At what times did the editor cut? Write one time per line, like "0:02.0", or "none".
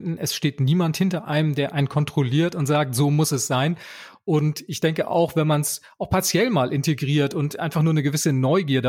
none